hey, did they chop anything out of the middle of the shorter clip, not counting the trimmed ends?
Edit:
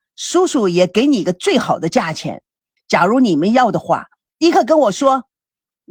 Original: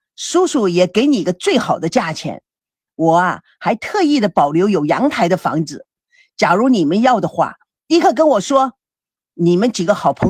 yes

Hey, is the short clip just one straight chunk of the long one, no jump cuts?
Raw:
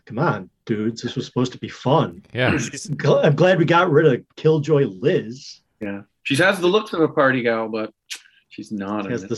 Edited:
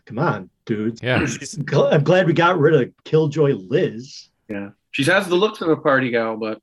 no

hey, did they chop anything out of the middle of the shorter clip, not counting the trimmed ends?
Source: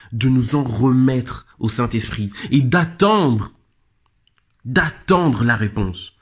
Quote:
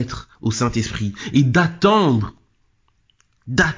no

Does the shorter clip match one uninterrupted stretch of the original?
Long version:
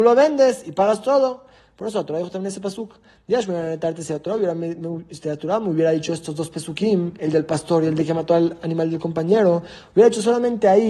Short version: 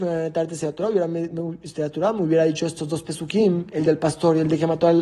yes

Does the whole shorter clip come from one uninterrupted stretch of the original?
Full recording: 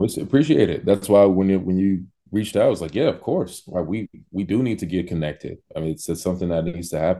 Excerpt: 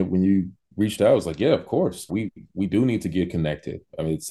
no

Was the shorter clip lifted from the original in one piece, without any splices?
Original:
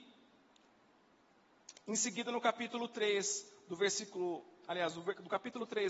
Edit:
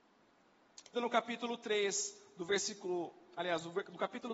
no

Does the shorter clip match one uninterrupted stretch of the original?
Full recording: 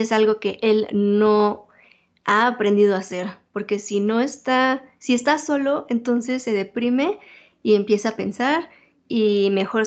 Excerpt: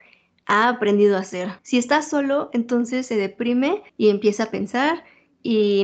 no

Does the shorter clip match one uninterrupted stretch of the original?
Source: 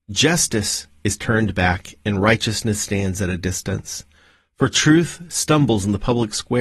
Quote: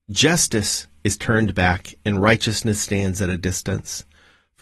yes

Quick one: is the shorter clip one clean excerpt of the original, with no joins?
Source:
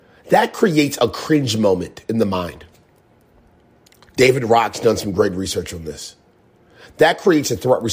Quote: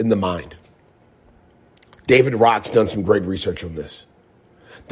yes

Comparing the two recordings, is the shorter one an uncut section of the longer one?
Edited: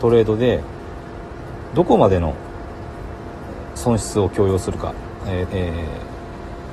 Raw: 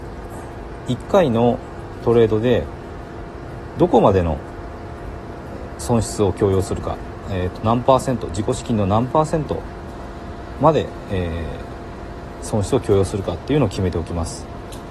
no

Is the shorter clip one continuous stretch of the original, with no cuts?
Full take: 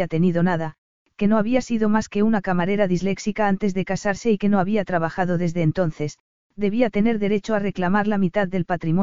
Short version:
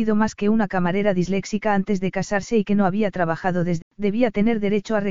no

